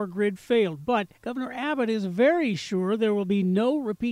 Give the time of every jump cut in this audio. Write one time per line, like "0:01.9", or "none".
0:01.2